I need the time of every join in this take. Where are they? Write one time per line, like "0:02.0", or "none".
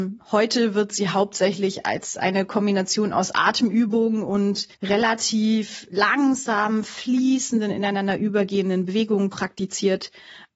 0:04.7